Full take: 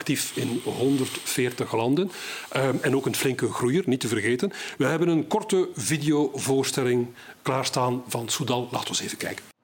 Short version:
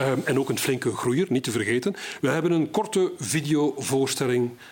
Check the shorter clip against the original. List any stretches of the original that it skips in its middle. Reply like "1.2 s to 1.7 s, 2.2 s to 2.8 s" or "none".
none